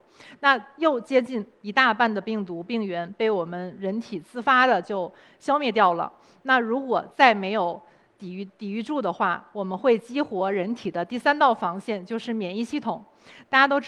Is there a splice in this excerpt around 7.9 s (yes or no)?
no